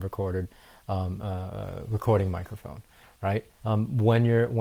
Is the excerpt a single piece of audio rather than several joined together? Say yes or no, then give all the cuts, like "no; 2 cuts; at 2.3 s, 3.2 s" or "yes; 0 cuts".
no; 1 cut; at 3.6 s